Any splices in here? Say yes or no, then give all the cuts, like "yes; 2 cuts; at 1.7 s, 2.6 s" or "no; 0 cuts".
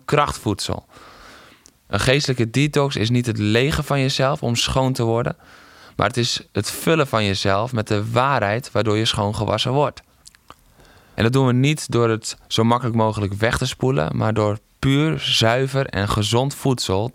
yes; 1 cut; at 11.2 s